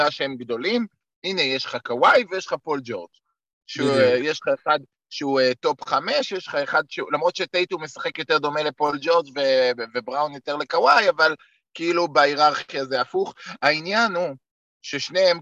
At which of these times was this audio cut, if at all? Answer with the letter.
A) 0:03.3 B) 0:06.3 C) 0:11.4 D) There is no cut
D